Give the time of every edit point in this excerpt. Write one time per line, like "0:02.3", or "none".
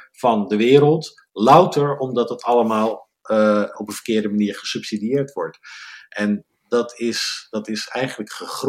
0:03.7